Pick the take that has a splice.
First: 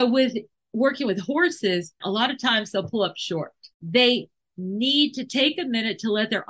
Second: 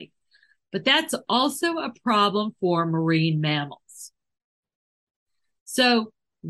first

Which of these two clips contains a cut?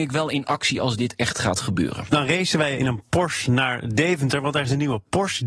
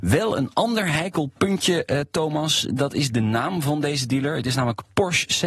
first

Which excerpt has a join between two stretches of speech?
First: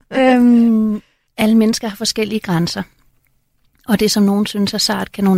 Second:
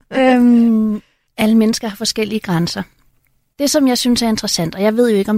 second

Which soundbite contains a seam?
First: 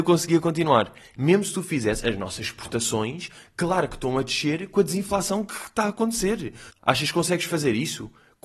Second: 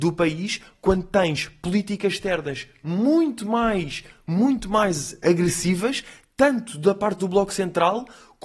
first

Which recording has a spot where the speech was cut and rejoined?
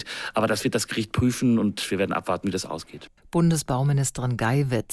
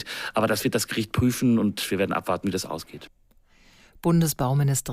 first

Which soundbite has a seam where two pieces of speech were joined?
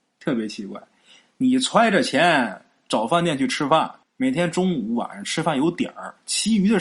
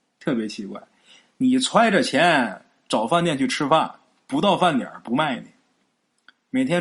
first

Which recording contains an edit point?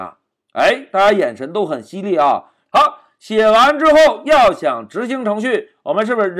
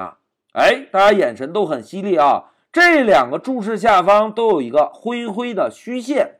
first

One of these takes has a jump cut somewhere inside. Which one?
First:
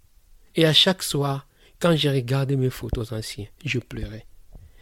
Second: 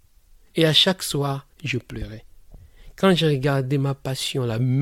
second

